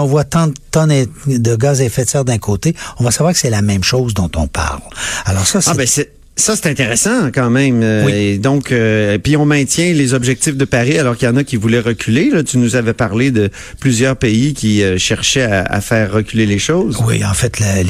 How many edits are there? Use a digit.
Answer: 0